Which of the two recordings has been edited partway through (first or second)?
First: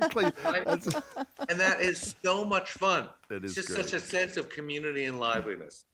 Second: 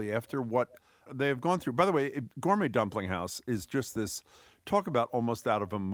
second